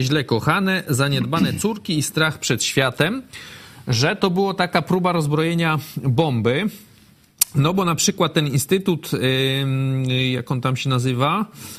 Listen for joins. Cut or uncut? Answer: uncut